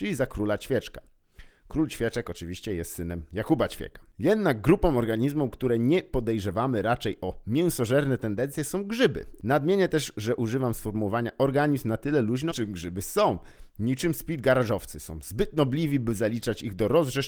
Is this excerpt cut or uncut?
cut